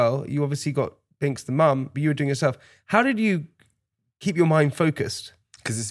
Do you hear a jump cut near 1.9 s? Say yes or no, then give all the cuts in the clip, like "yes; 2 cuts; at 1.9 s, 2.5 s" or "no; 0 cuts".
yes; 1 cut; at 1.9 s